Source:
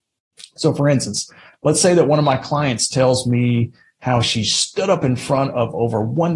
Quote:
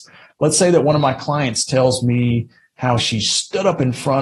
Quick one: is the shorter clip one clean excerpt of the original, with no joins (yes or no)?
yes